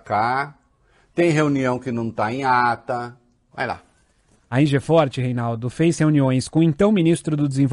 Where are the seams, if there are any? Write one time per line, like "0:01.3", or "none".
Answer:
0:03.5